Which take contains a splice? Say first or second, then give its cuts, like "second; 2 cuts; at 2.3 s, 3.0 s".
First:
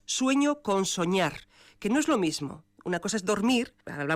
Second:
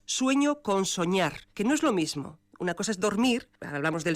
second; 1 cut; at 1.5 s